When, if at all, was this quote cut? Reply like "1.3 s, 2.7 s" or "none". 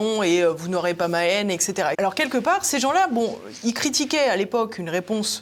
1.9 s